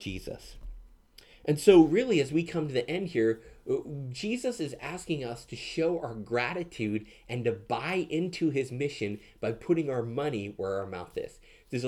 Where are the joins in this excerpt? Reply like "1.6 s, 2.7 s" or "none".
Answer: none